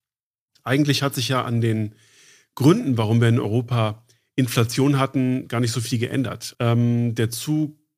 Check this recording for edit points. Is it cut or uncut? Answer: cut